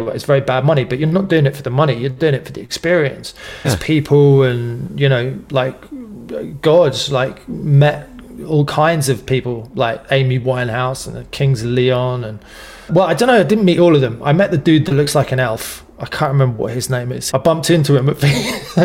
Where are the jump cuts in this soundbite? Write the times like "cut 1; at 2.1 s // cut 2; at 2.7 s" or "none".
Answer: cut 1; at 3.6 s // cut 2; at 12.9 s // cut 3; at 17.3 s